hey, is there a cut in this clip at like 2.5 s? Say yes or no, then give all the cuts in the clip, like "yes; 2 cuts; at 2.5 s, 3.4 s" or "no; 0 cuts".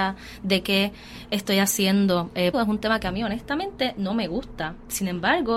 yes; 1 cut; at 2.5 s